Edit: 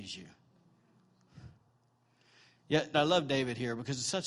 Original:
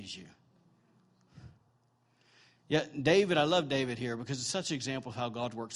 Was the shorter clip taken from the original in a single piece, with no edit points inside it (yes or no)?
no